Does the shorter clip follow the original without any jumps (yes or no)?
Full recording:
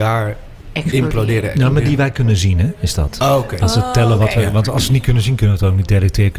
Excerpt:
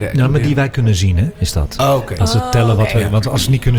yes